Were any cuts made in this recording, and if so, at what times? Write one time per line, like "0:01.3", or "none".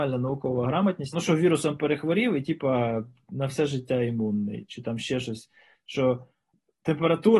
0:01.1